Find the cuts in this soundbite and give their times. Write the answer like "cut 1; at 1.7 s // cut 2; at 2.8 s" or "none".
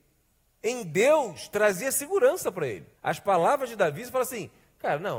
cut 1; at 3.0 s